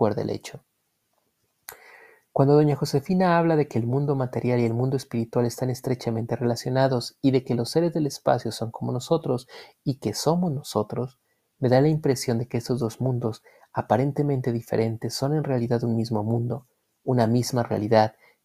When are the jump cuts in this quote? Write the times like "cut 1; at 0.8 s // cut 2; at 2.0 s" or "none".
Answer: none